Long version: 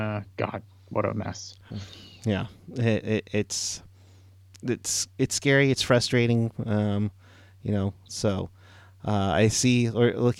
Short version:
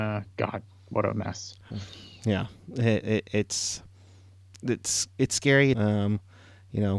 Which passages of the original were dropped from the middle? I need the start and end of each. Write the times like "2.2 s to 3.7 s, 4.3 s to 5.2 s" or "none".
5.7 s to 6.6 s